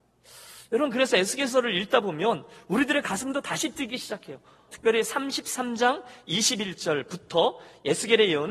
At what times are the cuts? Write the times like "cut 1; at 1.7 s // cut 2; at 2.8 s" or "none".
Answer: cut 1; at 4.7 s